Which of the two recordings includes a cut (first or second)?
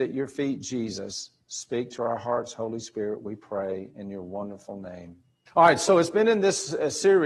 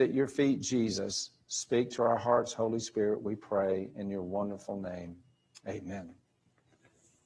first